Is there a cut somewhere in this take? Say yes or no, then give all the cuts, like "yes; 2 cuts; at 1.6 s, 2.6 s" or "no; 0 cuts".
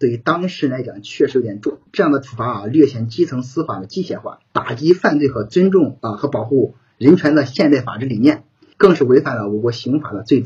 yes; 2 cuts; at 4.5 s, 8.7 s